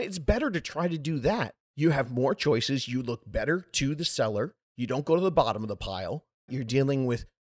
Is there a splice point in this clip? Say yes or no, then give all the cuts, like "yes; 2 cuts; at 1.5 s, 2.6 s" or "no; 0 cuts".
yes; 1 cut; at 6.5 s